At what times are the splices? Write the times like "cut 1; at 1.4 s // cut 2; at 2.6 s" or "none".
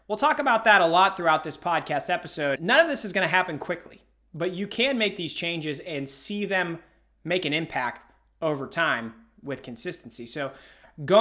cut 1; at 2.6 s

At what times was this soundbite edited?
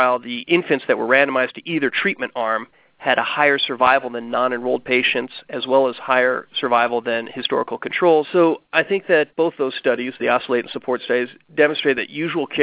cut 1; at 8.2 s

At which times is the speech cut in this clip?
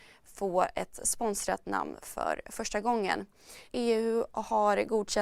cut 1; at 3.7 s

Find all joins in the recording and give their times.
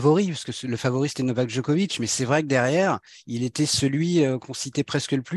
none

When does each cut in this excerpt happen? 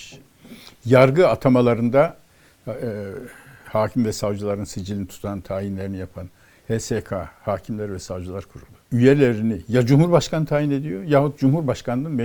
cut 1; at 3.6 s // cut 2; at 8.8 s

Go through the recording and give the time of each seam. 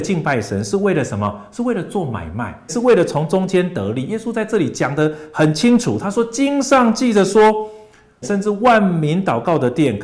cut 1; at 2.7 s // cut 2; at 8.2 s

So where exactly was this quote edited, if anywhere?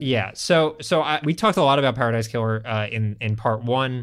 cut 1; at 1.2 s

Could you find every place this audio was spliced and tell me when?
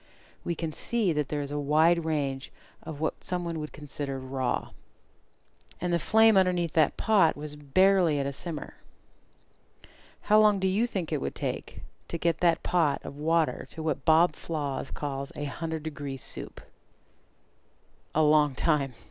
cut 1; at 5.7 s

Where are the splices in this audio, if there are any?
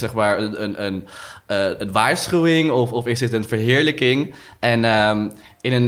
none

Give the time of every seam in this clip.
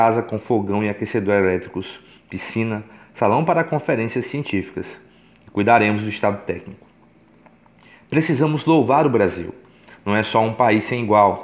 none

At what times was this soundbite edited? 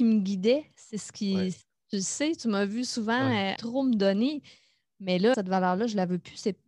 cut 1; at 3.6 s // cut 2; at 5.3 s

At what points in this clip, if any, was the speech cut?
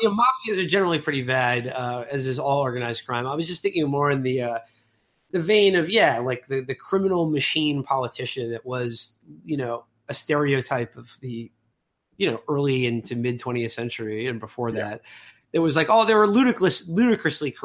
none

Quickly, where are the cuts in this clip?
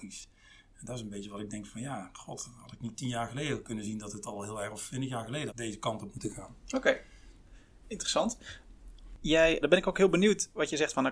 cut 1; at 5.5 s // cut 2; at 9.6 s

